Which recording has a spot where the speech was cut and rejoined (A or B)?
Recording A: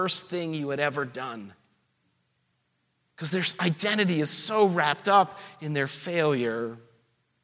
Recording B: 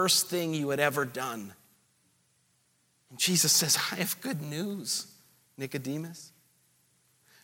B